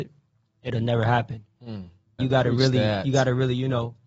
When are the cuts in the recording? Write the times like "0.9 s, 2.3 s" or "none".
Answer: 2.2 s